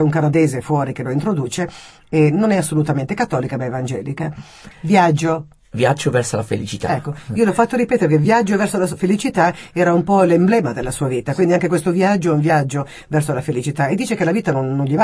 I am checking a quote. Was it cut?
yes; 1 cut; at 4.7 s

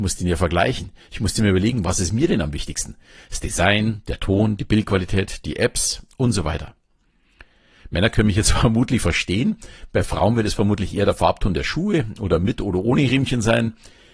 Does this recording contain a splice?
no; 0 cuts

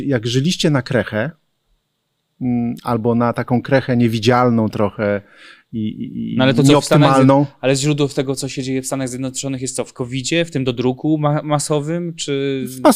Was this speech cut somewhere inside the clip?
no; 0 cuts

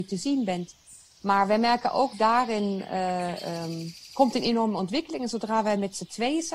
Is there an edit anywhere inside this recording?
no; 0 cuts

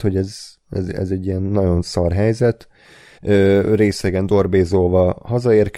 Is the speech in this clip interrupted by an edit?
yes; 1 cut; at 3.1 s

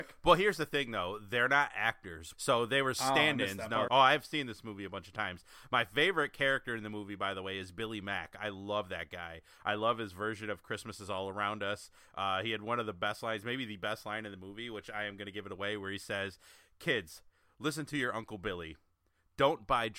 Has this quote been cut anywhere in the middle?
yes; 2 cuts; at 2.3 s, 3.9 s

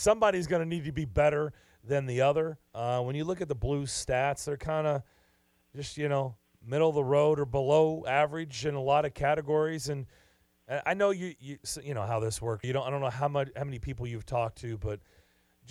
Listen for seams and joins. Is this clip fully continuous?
no; 1 cut; at 12.6 s

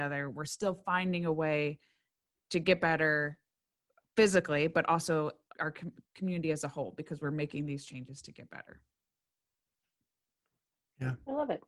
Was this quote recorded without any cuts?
no; 1 cut; at 5.5 s

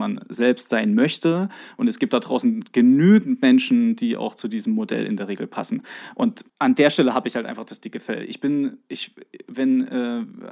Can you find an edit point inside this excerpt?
yes; 1 cut; at 6.5 s

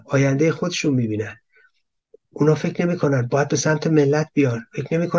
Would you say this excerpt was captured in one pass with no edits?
no; 1 cut; at 2.3 s

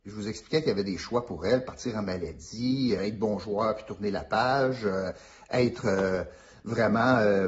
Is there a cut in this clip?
yes; 1 cut; at 3.0 s

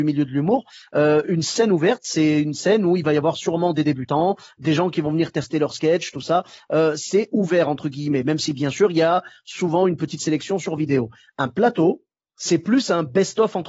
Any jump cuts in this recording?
no; 0 cuts

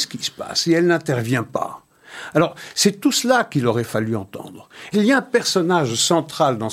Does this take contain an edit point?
yes; 1 cut; at 4.9 s

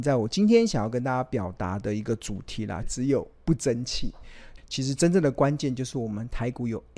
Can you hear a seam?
yes; 2 cuts; at 2.8 s, 4.6 s

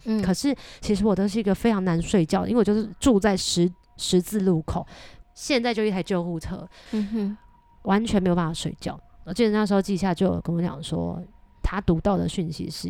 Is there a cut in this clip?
yes; 2 cuts; at 5.2 s, 6.9 s

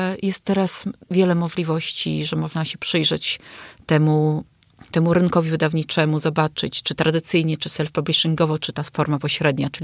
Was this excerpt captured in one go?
yes; 0 cuts

